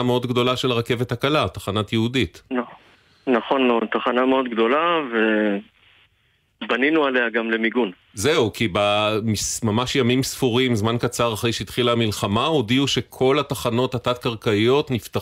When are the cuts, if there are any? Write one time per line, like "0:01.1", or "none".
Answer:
none